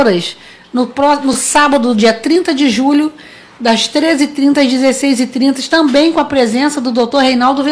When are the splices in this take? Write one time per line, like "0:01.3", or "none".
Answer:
none